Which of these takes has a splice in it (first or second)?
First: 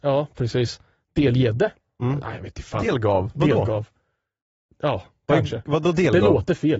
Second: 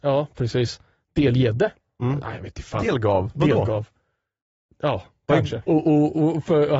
second